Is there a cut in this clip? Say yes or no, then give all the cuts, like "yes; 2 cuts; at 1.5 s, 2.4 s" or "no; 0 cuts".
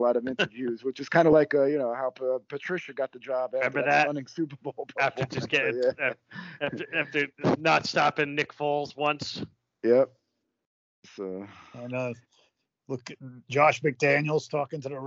no; 0 cuts